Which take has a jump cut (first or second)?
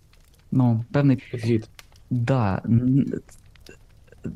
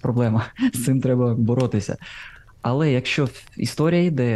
first